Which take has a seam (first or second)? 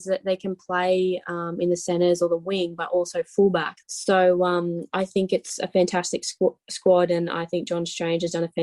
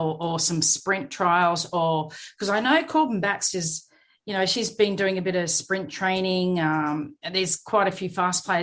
first